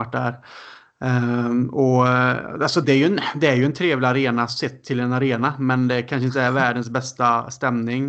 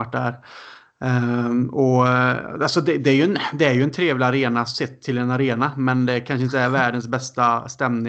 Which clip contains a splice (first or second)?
first